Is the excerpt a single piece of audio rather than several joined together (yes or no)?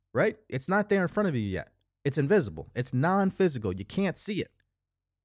yes